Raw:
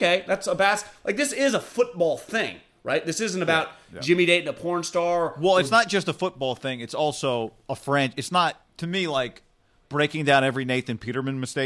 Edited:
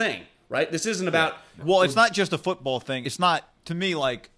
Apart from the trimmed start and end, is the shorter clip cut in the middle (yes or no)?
yes